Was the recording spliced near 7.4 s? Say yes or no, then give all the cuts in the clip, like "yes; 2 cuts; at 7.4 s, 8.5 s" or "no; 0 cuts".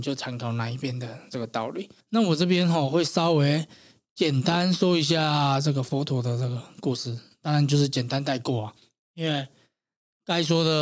no; 1 cut; at 2.0 s